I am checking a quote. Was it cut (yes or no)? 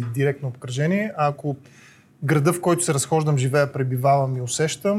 no